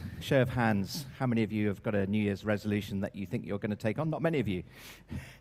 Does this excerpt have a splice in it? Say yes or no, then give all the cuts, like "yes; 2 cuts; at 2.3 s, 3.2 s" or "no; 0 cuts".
no; 0 cuts